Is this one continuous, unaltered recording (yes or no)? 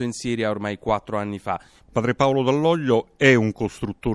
no